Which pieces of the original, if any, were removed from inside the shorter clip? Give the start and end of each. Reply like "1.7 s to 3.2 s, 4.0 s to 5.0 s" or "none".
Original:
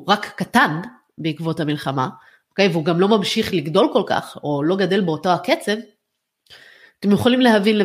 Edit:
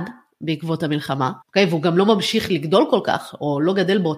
2.2 s to 2.4 s